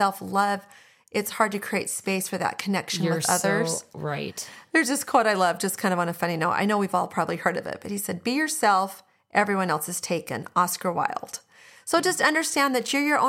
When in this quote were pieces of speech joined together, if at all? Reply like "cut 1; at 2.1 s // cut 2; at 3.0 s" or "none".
none